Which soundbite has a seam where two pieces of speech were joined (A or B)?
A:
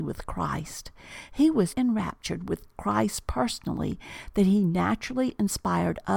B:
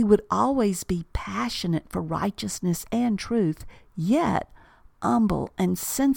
A